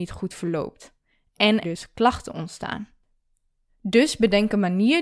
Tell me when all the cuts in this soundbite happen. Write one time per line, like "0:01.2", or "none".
0:01.6
0:03.7

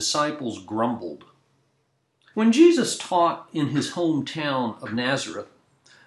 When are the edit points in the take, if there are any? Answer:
0:02.3

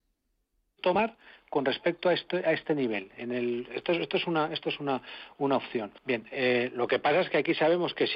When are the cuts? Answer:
0:06.0

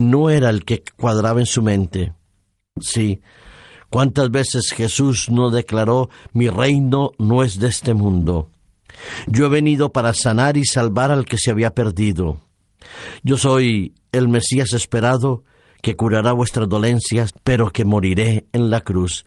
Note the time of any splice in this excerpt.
0:17.3

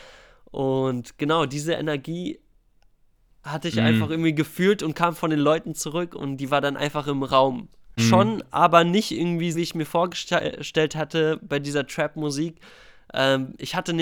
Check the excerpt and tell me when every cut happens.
0:08.0
0:09.5

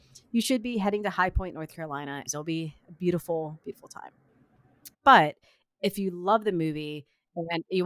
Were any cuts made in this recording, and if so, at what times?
0:02.3
0:04.9

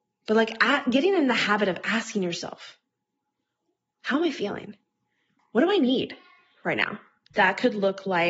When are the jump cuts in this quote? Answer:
0:07.3

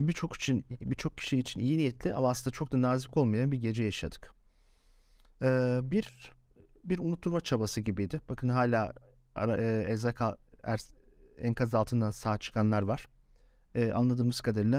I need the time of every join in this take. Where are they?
none

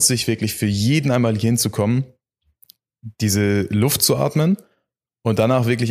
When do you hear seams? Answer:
none

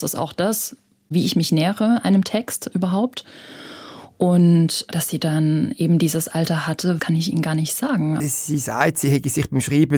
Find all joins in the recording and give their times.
0:07.0
0:08.2

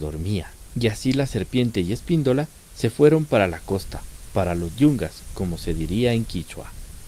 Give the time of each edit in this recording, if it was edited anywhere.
none

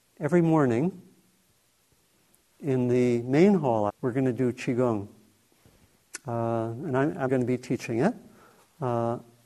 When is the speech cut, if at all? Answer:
0:03.9
0:07.3

